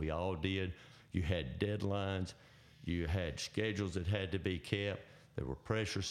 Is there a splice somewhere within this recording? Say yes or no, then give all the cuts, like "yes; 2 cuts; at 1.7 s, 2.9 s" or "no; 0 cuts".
no; 0 cuts